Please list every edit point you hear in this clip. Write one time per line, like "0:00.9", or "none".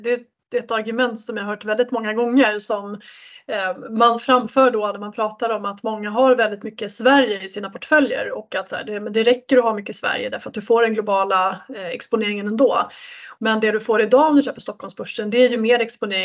0:13.4

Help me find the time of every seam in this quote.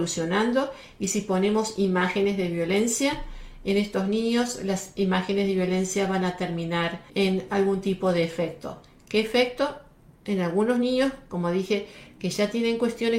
0:07.1

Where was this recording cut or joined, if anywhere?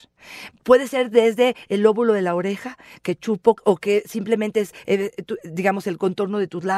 0:03.6

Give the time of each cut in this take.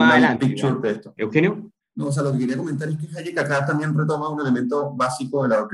0:01.2

